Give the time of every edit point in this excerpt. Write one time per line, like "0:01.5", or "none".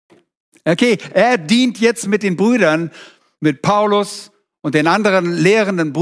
none